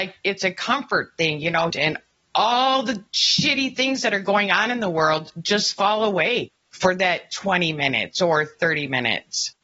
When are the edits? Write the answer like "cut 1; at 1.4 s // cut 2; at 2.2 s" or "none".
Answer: cut 1; at 1.7 s